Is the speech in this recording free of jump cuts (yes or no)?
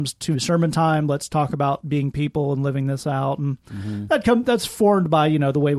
yes